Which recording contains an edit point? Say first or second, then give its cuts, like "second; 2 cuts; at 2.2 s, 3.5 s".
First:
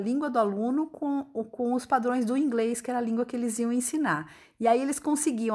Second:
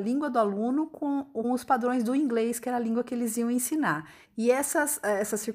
second; 2 cuts; at 1.4 s, 4.2 s